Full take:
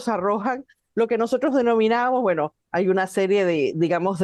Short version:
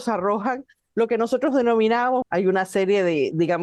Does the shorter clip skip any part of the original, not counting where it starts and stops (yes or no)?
yes